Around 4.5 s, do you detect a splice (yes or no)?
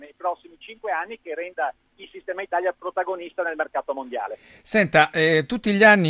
no